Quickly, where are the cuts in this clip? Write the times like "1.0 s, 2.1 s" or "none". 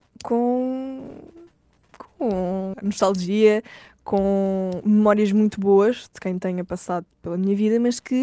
2.7 s